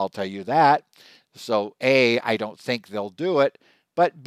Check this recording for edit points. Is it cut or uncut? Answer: uncut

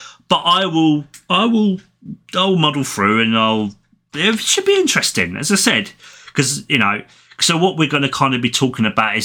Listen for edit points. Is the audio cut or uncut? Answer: uncut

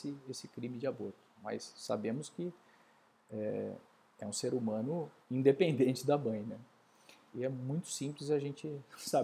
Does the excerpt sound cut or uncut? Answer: cut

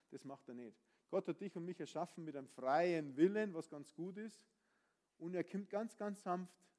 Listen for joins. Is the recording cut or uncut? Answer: uncut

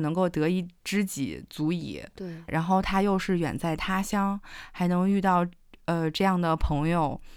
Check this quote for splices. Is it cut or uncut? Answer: cut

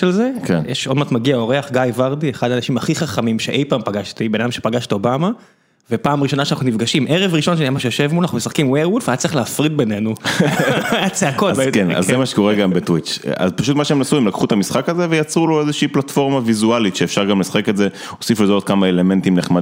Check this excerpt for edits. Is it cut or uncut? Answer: uncut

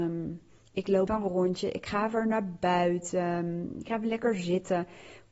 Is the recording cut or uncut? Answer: cut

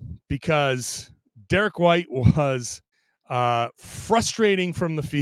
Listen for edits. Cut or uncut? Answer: uncut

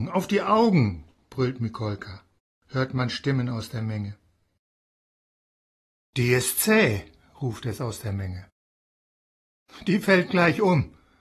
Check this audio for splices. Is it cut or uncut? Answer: cut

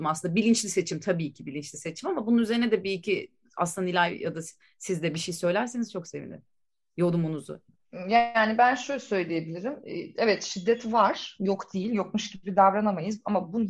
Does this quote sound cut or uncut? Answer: uncut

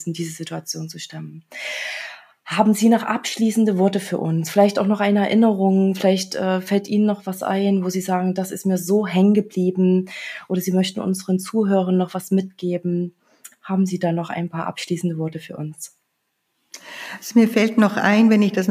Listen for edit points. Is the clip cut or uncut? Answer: uncut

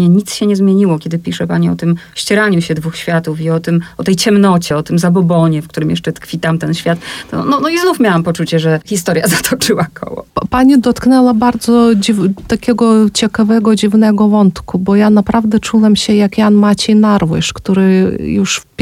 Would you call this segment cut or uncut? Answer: uncut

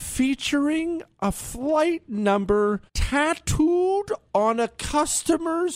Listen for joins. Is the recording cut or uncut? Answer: cut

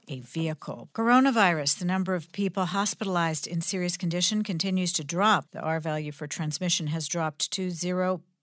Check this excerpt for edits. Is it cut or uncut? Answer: cut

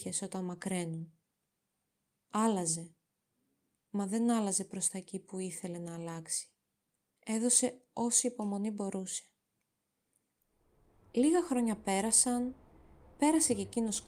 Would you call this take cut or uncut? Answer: uncut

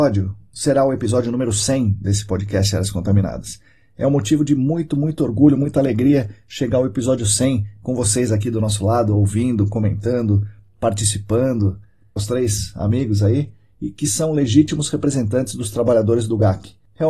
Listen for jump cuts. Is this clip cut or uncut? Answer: cut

